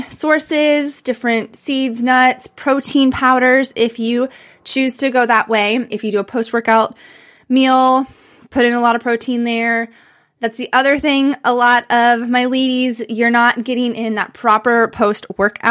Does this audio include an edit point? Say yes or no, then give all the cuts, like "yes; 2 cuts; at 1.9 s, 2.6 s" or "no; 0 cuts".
yes; 1 cut; at 5.9 s